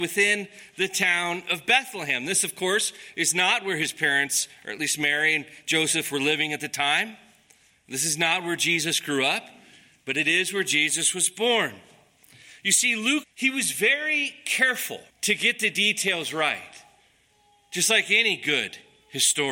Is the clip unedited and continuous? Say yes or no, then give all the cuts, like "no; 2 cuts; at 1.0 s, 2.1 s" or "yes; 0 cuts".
no; 2 cuts; at 13.2 s, 15.1 s